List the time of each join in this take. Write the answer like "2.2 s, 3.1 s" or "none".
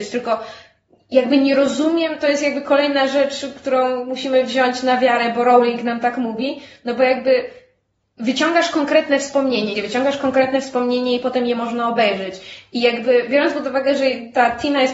9.7 s